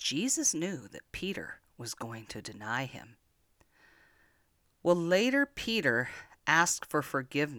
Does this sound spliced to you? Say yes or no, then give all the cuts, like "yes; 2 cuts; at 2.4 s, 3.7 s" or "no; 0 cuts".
no; 0 cuts